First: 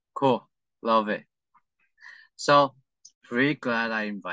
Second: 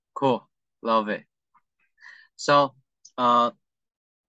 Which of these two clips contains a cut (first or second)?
first